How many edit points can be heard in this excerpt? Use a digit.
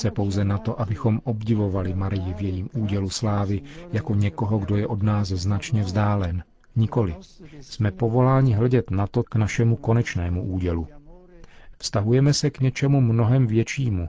2